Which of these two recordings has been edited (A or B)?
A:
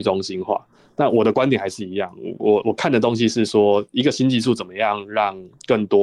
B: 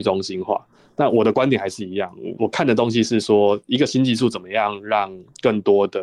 B